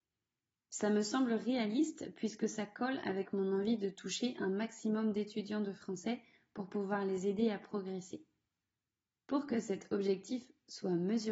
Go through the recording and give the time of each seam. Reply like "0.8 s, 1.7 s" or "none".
9.2 s